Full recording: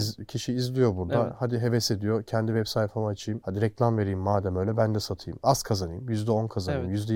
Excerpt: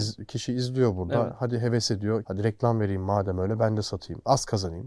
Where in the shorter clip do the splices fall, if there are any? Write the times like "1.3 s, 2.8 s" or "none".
2.2 s